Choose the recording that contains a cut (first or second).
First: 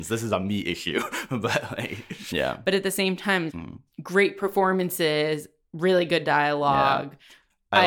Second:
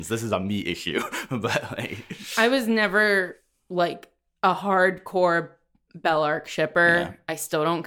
first